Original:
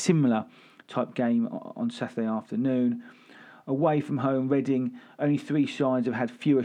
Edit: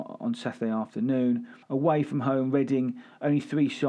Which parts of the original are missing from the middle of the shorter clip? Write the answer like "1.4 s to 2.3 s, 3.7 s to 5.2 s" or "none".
3.2 s to 3.6 s